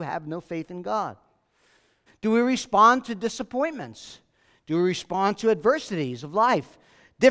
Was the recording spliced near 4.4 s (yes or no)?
no